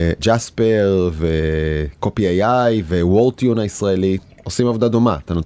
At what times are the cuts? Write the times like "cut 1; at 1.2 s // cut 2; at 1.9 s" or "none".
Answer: none